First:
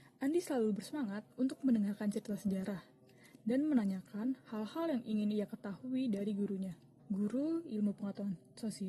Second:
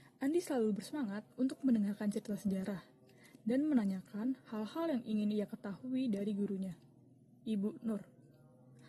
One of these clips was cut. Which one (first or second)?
first